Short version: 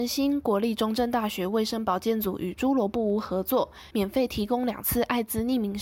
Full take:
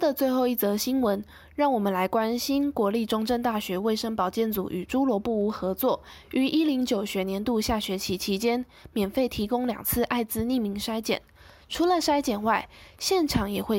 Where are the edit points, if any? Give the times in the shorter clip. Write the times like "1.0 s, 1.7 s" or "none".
3.9 s